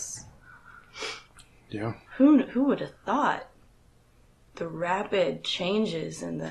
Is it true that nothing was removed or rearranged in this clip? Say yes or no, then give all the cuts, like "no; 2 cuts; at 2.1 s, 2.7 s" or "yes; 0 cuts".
no; 2 cuts; at 2.1 s, 4.5 s